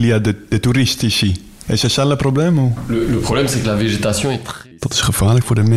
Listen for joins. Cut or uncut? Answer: cut